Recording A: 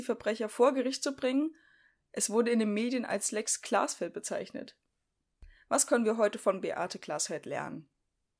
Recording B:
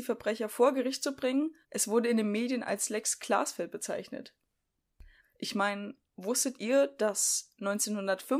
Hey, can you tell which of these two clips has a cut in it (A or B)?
B